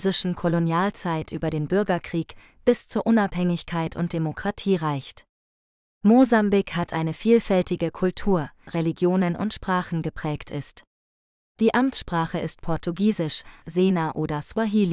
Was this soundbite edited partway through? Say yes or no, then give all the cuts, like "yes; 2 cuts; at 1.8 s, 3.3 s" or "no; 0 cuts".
yes; 2 cuts; at 8.7 s, 13.6 s